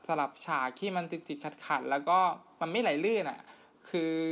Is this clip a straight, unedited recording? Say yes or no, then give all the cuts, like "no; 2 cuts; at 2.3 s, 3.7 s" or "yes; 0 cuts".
yes; 0 cuts